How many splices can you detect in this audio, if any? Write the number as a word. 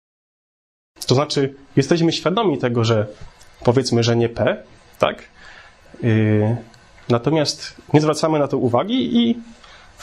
zero